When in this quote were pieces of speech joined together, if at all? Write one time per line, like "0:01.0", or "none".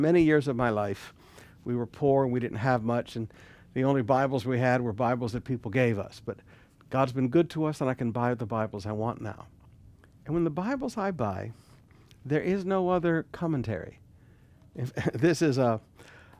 none